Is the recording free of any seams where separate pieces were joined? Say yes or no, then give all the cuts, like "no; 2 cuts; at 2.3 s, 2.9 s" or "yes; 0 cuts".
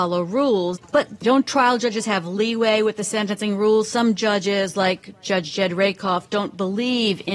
yes; 0 cuts